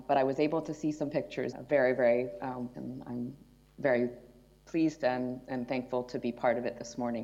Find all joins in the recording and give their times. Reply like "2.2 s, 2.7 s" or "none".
1.5 s, 2.7 s